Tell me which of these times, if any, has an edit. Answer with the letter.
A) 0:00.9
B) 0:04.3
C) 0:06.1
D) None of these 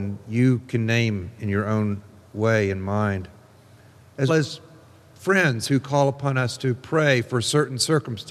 B